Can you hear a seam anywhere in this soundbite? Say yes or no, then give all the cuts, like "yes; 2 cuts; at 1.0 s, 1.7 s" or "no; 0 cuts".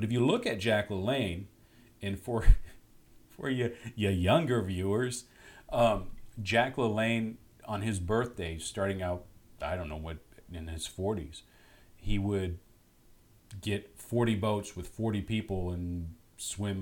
no; 0 cuts